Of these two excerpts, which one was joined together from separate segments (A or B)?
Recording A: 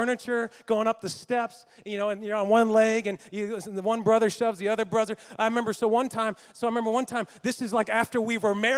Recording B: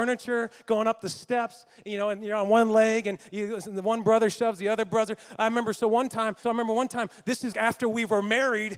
B